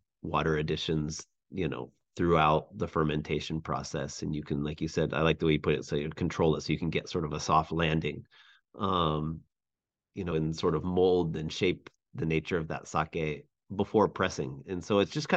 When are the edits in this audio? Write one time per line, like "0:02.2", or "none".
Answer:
0:10.3